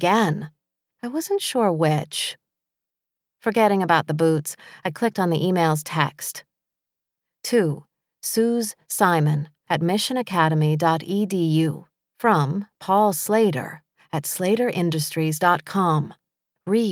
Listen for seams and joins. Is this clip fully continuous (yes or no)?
no